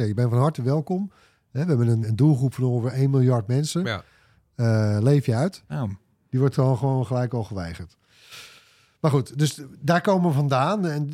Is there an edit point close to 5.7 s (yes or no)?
yes